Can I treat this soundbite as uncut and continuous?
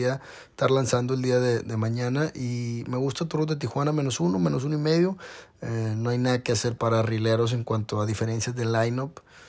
no; 3 cuts; at 1.6 s, 5.5 s, 6.8 s

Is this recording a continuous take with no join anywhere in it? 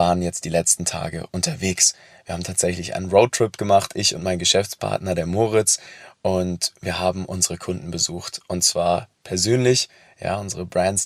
yes; 0 cuts

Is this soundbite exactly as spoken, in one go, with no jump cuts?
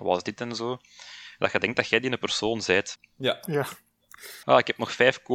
no; 2 cuts; at 3.0 s, 4.4 s

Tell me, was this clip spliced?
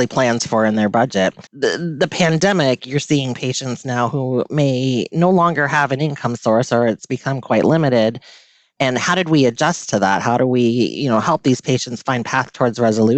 yes; 1 cut; at 1.5 s

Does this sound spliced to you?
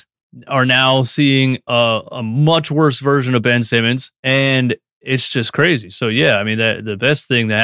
yes; 1 cut; at 4.2 s

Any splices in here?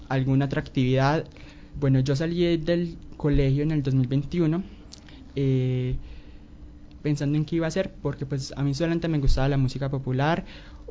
yes; 2 cuts; at 1.7 s, 7.0 s

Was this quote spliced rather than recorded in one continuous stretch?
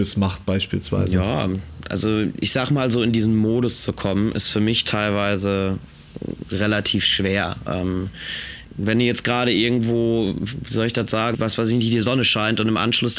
yes; 2 cuts; at 7.7 s, 11.3 s

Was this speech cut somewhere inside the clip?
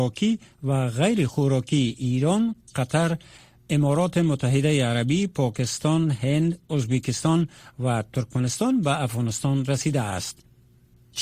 no; 0 cuts

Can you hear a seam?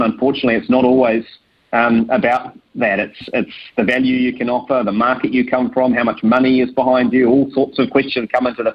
no; 0 cuts

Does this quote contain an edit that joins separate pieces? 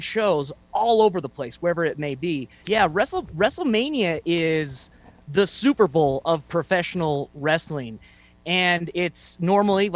yes; 1 cut; at 2.6 s

